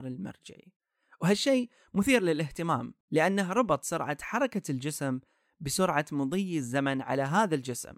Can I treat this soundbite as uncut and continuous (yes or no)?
no